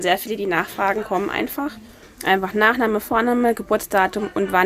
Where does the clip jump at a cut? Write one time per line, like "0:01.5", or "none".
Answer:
0:02.0